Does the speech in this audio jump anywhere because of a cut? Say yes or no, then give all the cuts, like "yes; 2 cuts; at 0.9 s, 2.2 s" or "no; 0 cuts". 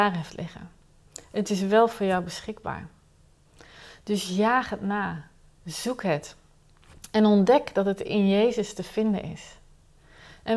no; 0 cuts